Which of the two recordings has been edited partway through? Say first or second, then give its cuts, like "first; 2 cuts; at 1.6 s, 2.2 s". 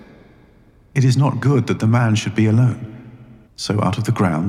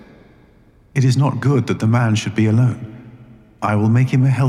first; 1 cut; at 3.5 s